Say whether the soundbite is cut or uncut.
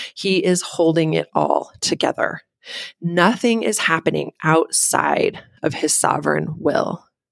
uncut